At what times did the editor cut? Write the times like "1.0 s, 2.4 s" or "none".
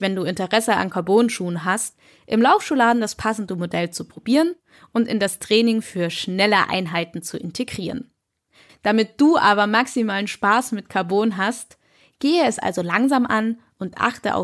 8.7 s